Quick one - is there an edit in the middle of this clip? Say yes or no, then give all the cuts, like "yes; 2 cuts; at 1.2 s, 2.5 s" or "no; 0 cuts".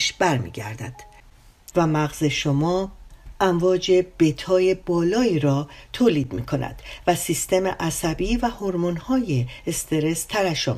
yes; 1 cut; at 1.7 s